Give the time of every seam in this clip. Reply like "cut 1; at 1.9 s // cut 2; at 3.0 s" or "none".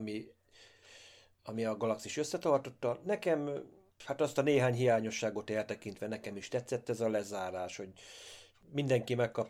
none